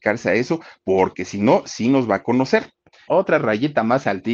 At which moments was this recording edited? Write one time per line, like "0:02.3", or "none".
0:03.1